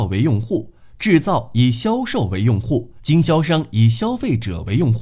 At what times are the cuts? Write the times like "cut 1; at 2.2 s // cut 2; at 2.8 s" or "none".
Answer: cut 1; at 3.0 s